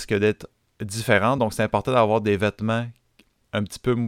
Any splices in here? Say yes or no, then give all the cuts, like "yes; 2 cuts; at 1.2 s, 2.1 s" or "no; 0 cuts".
no; 0 cuts